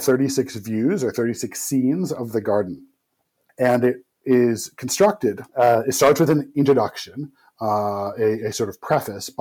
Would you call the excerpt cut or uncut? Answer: cut